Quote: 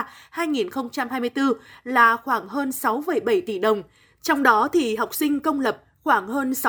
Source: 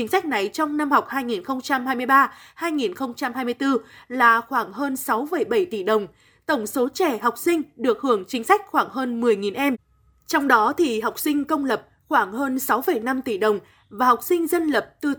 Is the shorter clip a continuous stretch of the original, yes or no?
no